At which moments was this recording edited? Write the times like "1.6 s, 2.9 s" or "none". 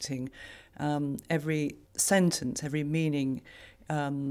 1.8 s